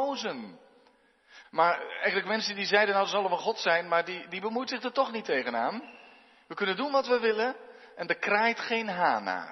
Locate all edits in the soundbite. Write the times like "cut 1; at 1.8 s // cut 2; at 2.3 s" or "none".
cut 1; at 1.4 s